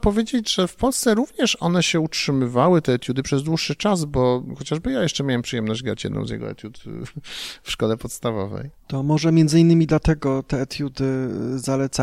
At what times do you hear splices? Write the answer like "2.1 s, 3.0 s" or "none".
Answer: 8.8 s